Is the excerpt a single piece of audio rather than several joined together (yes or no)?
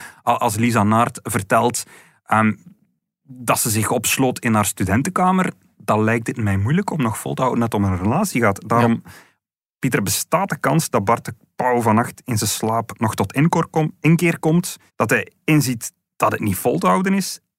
no